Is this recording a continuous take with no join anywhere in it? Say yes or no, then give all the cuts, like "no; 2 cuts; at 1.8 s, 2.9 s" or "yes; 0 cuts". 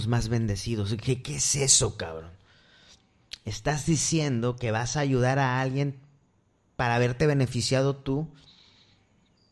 no; 1 cut; at 1.2 s